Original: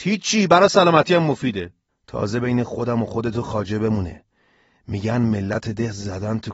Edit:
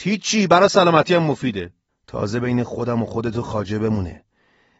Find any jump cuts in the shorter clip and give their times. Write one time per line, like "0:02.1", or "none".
none